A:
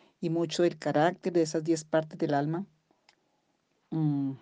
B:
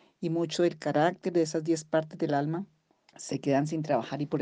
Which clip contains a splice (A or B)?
B